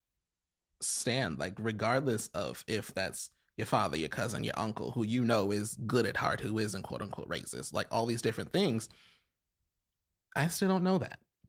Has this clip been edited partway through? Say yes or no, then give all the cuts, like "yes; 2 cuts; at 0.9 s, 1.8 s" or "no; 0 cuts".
no; 0 cuts